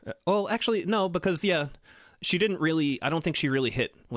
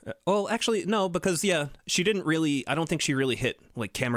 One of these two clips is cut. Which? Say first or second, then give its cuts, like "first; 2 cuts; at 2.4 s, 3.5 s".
second; 1 cut; at 1.8 s